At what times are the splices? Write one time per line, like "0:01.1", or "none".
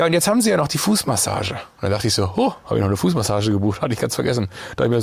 none